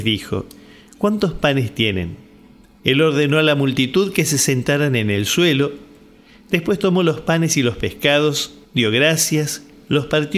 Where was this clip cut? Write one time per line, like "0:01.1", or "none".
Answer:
0:02.8
0:08.6